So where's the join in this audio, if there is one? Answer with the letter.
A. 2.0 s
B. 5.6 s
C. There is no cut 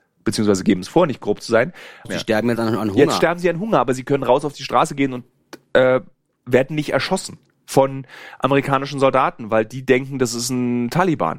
A